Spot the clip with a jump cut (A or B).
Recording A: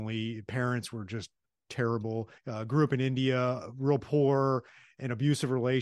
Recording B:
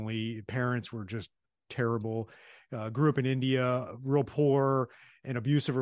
A